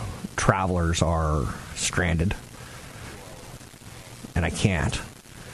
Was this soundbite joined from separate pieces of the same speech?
yes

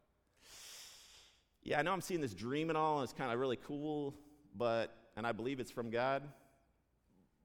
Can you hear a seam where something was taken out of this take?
no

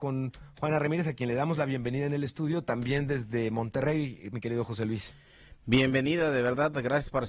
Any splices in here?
no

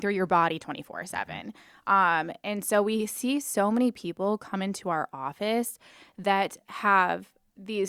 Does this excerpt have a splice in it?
no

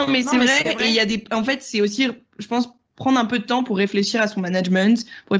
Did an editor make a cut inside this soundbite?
no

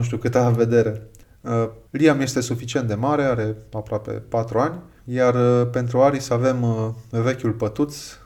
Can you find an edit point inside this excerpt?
yes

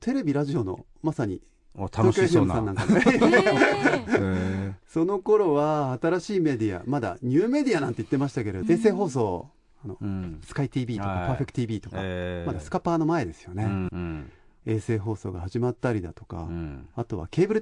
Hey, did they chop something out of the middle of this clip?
yes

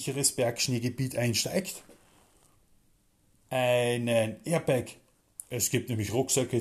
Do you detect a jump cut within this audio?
no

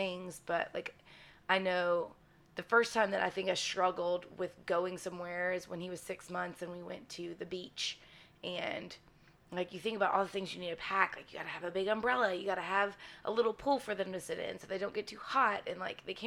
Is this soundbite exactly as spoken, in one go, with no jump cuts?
yes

